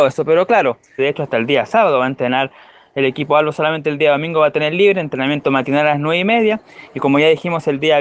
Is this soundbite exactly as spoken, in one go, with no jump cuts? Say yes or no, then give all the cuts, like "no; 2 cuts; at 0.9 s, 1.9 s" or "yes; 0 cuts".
no; 1 cut; at 1.0 s